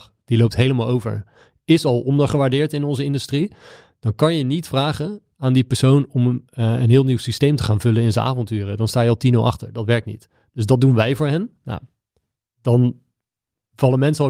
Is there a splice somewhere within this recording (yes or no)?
no